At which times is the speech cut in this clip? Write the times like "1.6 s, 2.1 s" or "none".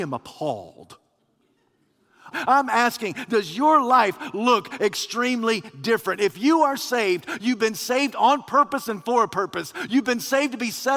2.3 s